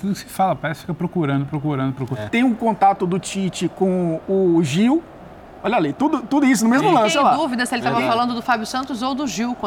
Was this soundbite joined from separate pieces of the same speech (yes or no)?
yes